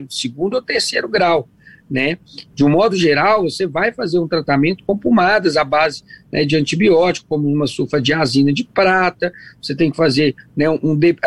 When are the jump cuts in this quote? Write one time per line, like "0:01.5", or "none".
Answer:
0:02.5